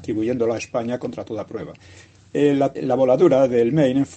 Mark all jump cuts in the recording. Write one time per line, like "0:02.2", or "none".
0:02.8